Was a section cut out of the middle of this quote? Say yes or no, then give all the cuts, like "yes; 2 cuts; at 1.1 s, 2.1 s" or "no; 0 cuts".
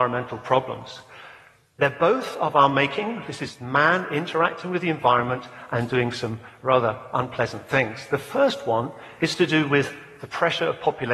no; 0 cuts